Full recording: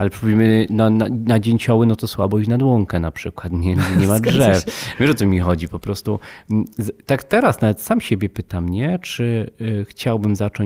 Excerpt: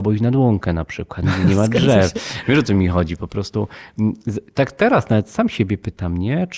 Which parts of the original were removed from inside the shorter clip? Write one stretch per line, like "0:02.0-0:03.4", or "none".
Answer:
0:03.5-0:03.7